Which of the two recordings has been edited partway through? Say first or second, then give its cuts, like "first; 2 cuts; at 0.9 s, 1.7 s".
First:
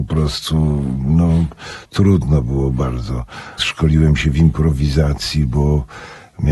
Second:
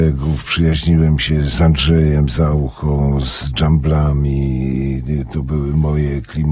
first; 1 cut; at 3.6 s